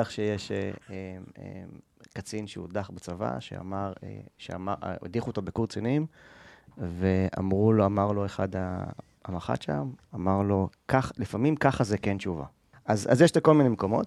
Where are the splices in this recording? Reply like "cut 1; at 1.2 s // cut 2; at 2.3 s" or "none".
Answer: cut 1; at 10.0 s // cut 2; at 12.7 s